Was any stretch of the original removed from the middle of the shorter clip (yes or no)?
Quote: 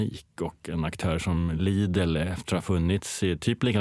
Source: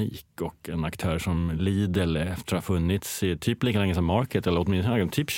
no